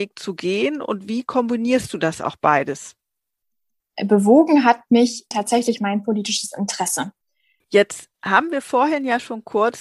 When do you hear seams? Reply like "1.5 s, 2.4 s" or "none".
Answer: 5.3 s, 7.6 s